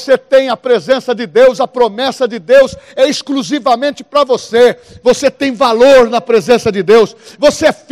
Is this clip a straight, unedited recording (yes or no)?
yes